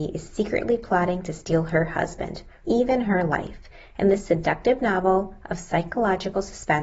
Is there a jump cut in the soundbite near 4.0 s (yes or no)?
no